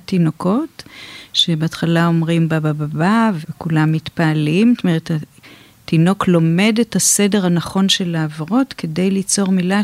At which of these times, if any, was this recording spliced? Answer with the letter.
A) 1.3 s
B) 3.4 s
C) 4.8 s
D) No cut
B